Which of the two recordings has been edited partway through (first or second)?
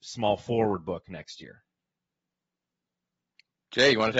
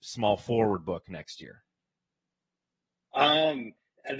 second